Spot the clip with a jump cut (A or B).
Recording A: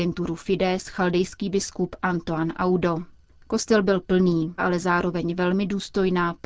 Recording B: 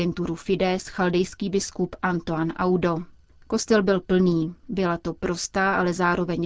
A